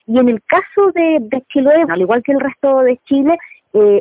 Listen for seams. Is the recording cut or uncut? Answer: cut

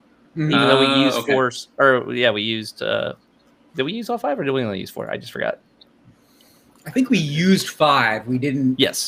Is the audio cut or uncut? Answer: uncut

